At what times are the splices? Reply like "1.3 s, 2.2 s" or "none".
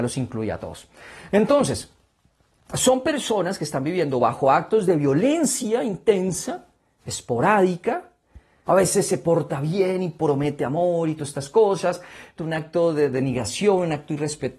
8.7 s, 12.4 s